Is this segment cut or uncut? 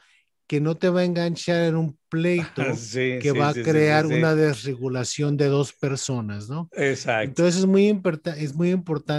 uncut